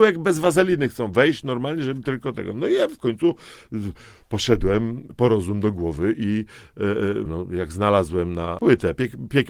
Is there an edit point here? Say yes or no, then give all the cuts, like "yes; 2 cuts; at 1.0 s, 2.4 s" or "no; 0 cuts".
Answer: yes; 2 cuts; at 7.3 s, 8.6 s